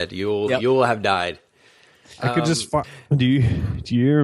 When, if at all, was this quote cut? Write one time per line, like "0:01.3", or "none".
0:02.8